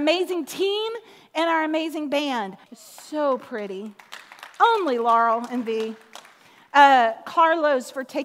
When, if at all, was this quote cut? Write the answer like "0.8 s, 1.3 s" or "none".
2.6 s